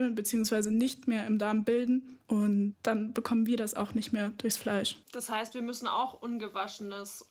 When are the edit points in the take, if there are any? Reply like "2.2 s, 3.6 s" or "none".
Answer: 5.0 s